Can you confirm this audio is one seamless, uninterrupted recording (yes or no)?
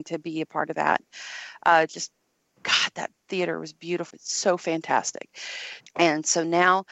no